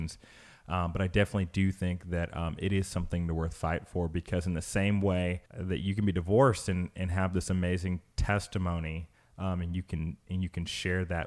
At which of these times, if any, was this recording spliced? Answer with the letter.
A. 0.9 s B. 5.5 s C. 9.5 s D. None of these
B